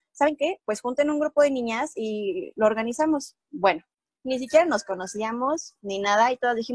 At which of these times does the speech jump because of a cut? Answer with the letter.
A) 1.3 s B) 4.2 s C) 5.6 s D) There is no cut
B